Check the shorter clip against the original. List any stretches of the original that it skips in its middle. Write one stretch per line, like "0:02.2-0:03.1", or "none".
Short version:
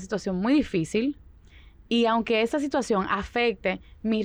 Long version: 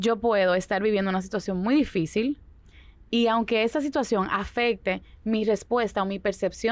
none